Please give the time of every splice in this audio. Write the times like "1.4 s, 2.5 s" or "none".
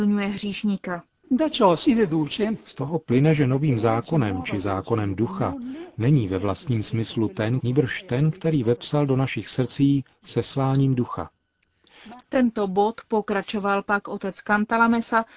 7.6 s, 12.2 s